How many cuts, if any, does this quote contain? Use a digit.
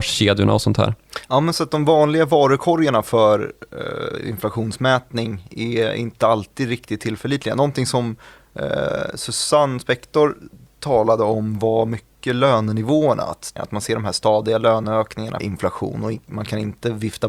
2